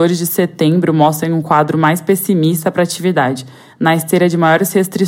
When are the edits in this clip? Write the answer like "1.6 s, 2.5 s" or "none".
none